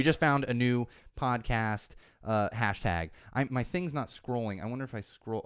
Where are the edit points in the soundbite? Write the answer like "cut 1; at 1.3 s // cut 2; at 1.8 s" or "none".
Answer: cut 1; at 3.5 s